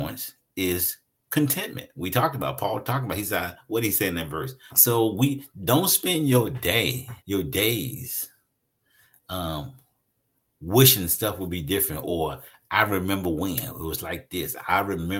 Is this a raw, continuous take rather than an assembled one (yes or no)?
no